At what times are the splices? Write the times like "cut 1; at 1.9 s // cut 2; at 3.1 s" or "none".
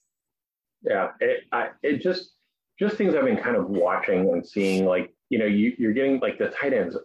cut 1; at 5.2 s